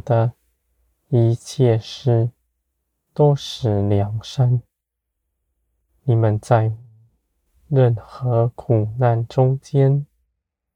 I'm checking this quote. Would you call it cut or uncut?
uncut